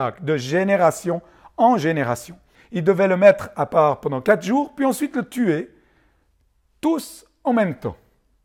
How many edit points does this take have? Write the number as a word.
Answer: one